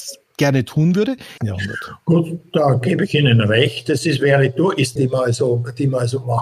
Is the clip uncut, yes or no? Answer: no